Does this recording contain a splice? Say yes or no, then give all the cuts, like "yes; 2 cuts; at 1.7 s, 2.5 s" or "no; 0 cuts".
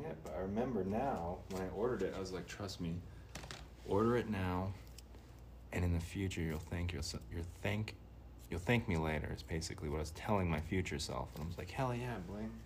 no; 0 cuts